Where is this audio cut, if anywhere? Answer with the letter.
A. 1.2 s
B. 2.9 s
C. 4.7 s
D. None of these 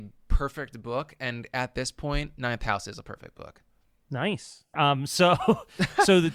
C